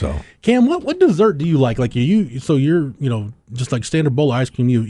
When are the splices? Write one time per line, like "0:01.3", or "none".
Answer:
none